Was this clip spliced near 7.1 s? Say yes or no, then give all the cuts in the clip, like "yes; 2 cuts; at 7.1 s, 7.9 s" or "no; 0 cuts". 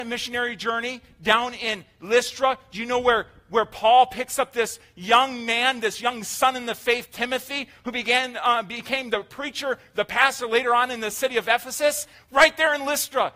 no; 0 cuts